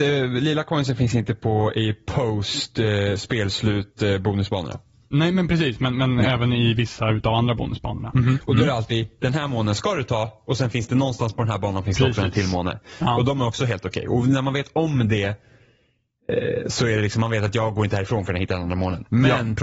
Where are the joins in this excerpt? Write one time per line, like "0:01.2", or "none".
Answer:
0:08.1